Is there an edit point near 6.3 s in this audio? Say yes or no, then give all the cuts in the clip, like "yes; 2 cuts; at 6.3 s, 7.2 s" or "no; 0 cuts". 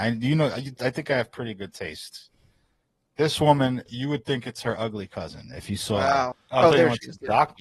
yes; 2 cuts; at 3.9 s, 6.3 s